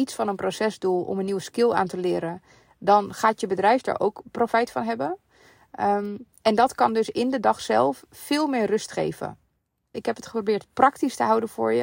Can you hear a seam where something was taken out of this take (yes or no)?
yes